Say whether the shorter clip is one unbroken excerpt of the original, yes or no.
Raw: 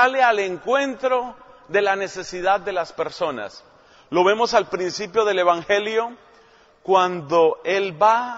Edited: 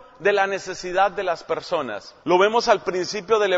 no